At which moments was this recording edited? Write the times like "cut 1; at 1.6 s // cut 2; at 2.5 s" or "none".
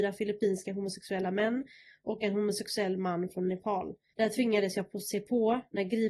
cut 1; at 4.1 s